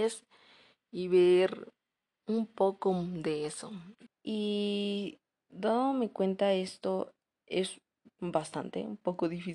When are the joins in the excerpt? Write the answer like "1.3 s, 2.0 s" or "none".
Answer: 4.1 s